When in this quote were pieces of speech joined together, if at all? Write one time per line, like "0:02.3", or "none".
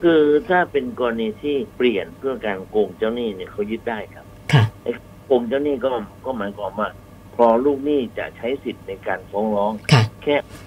0:01.7